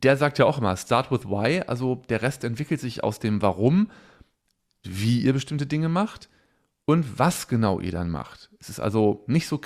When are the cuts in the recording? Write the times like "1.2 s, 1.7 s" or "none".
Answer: 4.8 s

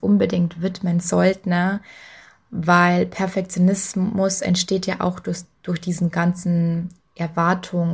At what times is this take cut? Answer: none

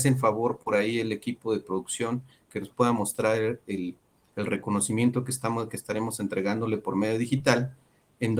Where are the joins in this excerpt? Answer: none

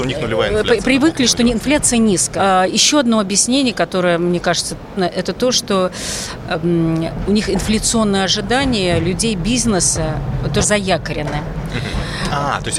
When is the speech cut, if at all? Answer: 2.4 s, 5.0 s, 10.6 s

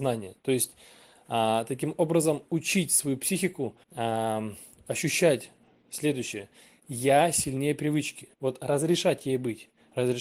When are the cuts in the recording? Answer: 3.8 s, 8.3 s

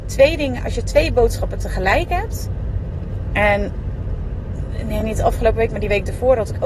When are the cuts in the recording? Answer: none

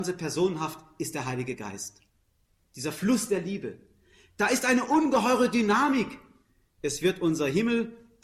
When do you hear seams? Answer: none

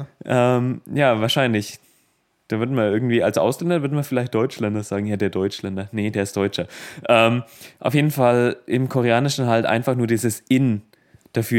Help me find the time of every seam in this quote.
none

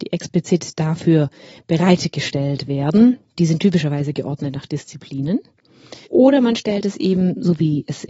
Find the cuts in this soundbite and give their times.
3.4 s, 6.0 s

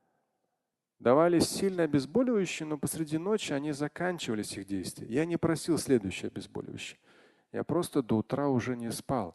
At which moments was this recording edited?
none

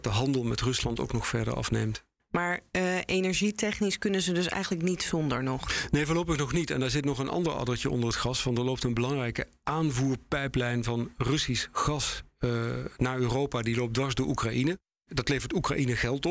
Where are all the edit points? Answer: none

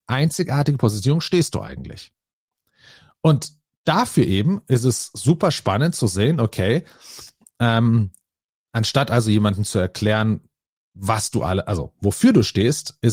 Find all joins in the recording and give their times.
none

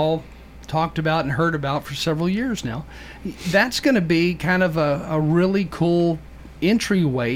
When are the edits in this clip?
none

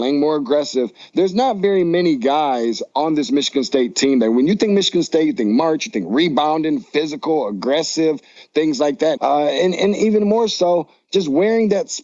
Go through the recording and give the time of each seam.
9.2 s

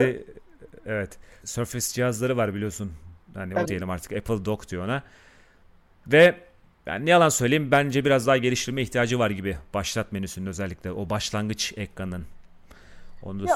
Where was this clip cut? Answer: 1.4 s, 3.6 s

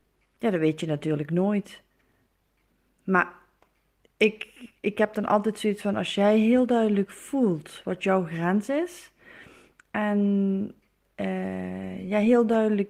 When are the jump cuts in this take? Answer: none

